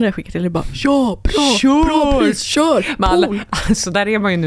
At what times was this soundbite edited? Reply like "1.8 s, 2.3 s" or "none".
none

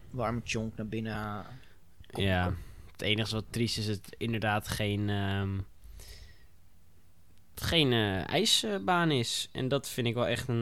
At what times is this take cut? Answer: none

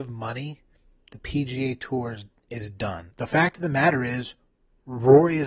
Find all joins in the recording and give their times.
3.1 s

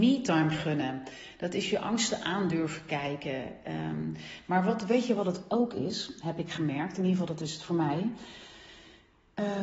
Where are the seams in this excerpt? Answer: none

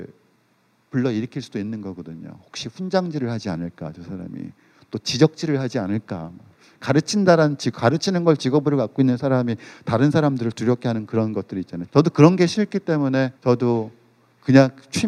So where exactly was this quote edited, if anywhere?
11.9 s, 13.4 s

